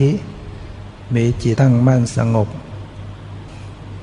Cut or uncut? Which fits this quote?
cut